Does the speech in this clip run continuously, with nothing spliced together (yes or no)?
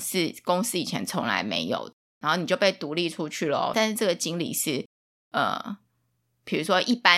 no